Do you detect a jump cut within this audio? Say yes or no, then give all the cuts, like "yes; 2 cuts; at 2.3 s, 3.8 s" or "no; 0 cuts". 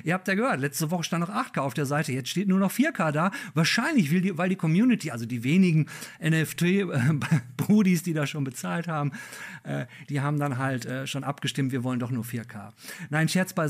no; 0 cuts